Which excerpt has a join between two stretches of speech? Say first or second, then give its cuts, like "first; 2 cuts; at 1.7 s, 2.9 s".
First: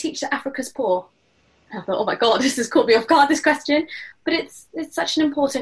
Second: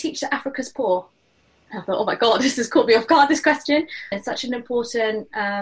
second; 1 cut; at 4.1 s